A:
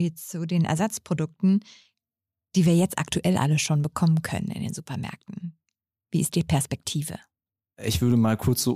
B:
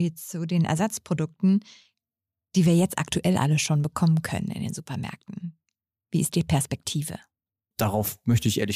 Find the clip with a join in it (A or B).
B